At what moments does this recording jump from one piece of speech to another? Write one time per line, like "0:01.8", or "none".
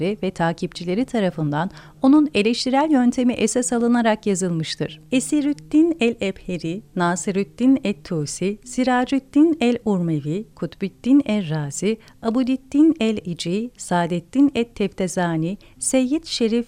0:10.5